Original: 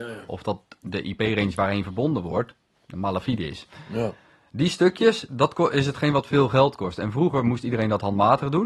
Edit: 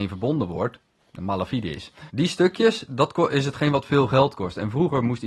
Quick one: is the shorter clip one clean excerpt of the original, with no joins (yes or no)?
no